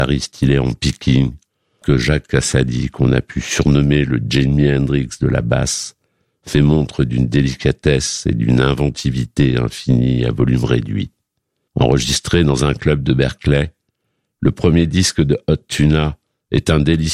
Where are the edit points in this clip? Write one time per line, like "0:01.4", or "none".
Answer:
0:01.8
0:11.7